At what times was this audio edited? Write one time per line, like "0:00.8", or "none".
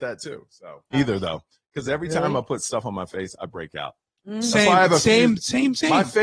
0:00.9